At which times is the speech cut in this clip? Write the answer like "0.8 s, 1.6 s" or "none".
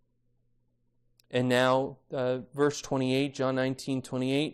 none